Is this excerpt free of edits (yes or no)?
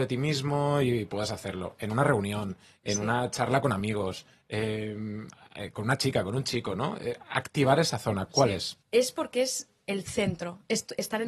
no